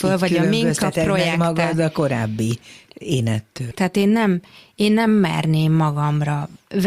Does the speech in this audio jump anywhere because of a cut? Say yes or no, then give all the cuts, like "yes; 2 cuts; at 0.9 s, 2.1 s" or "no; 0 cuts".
yes; 1 cut; at 3.7 s